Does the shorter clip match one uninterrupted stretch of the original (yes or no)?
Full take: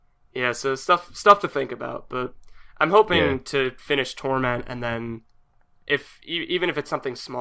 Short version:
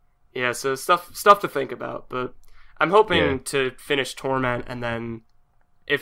yes